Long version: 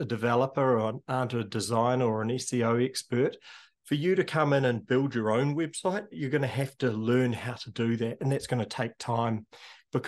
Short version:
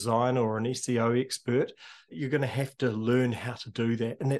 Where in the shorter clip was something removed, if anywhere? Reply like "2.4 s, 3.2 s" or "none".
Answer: 2.1 s